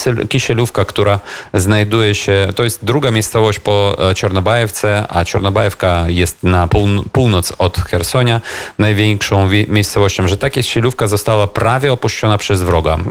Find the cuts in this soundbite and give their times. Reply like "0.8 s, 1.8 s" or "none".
6.7 s